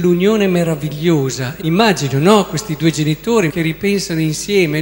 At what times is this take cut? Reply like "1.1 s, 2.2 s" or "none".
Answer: 1.6 s, 3.5 s

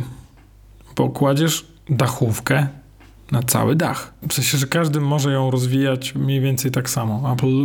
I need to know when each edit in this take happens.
4.2 s

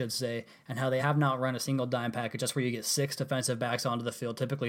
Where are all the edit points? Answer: 1.0 s

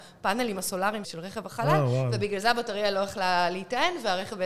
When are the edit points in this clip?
1.0 s

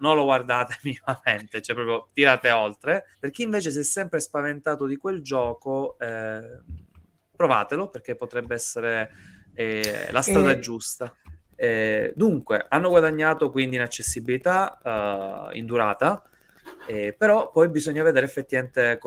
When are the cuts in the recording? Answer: 3.1 s, 11.5 s

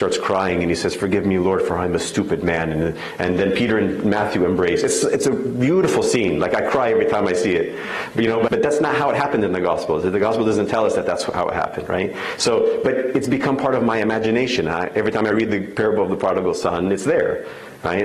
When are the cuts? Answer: 8.5 s

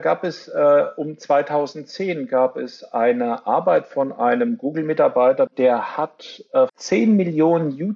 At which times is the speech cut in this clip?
5.5 s, 6.7 s

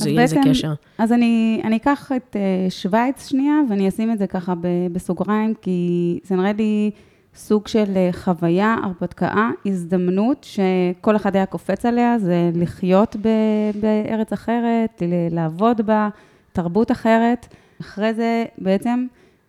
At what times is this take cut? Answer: 17.8 s

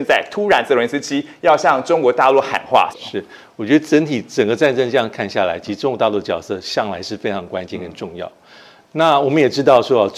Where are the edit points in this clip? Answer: 2.9 s

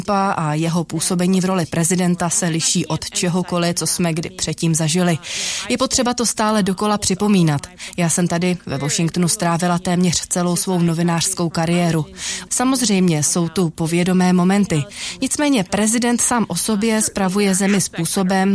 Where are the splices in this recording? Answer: 12.5 s

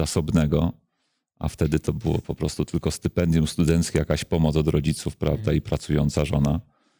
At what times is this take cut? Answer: none

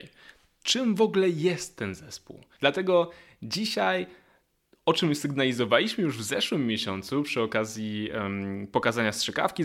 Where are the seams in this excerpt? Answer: 2.6 s

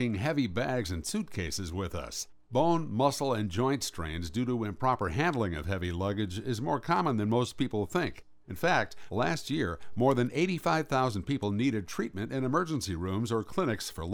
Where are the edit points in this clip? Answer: none

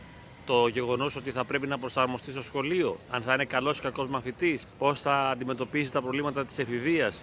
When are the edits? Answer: 3.1 s, 4.7 s

